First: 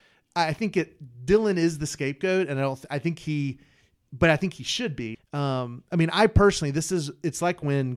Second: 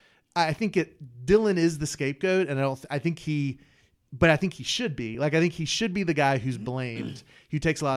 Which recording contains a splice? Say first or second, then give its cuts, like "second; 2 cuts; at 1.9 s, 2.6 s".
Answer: first; 1 cut; at 5.1 s